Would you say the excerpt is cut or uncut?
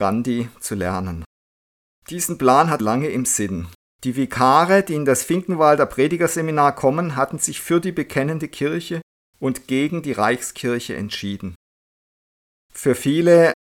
cut